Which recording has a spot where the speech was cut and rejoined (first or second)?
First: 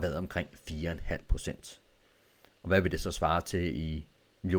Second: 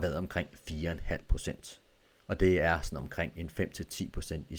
second